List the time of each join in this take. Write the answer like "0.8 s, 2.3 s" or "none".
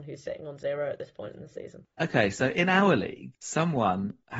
none